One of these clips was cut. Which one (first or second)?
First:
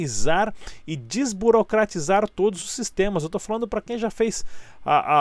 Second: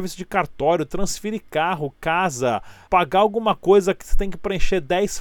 second